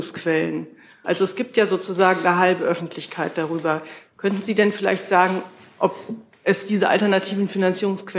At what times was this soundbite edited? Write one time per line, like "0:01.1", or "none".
0:01.0